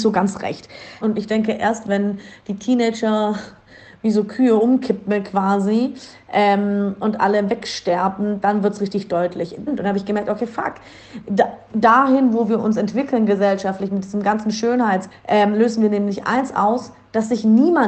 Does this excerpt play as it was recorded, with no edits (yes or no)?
no